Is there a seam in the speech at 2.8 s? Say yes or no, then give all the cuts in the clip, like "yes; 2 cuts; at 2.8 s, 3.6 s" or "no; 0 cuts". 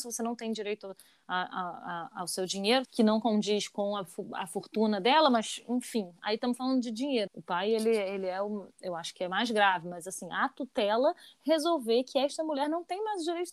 yes; 2 cuts; at 2.8 s, 7.3 s